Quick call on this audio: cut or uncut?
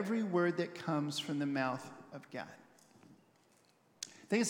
uncut